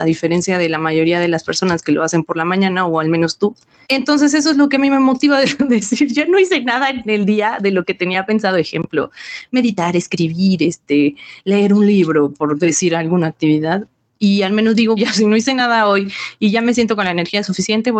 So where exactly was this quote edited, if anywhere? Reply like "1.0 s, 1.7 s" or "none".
3.8 s, 15.0 s

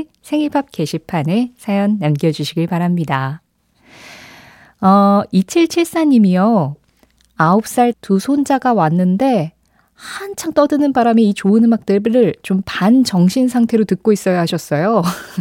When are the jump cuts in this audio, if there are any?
7.9 s

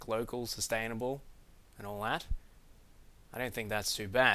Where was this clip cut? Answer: none

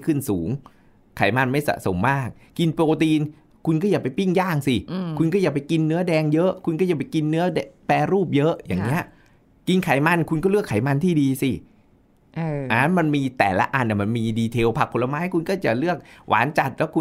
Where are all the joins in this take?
none

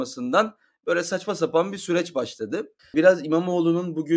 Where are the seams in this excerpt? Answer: 2.8 s

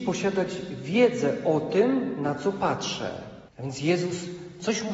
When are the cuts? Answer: 3.5 s

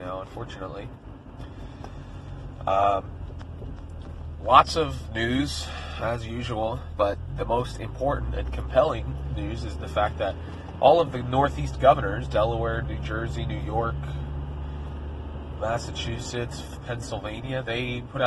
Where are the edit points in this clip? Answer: 15.6 s

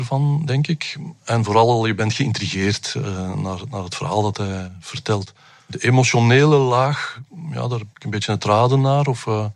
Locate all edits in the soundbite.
7.9 s

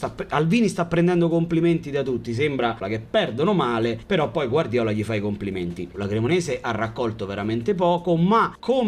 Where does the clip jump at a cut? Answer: 2.8 s, 5.9 s

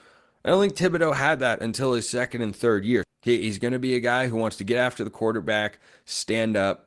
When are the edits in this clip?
3.0 s

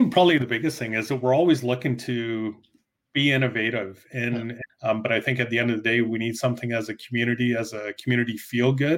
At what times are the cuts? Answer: 4.7 s

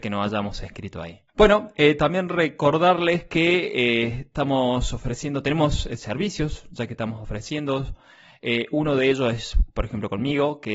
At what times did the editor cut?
1.3 s

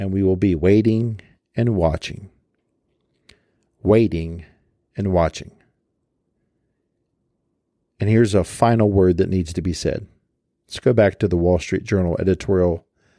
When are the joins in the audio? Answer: none

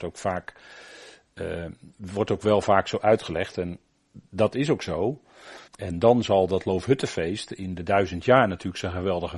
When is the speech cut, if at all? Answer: 5.7 s

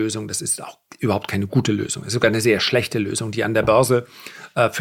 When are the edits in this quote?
none

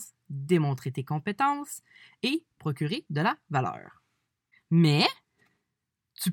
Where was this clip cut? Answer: 4.6 s

